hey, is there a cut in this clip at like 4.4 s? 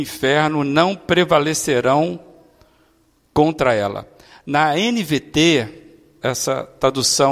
no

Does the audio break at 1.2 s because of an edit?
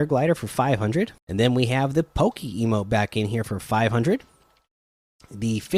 yes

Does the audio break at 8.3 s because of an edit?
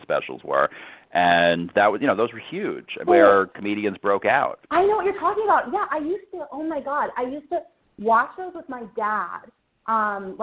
no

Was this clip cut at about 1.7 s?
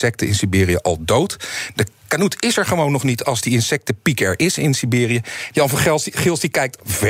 no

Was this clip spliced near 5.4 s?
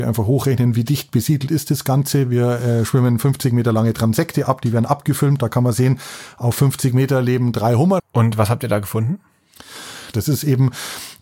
no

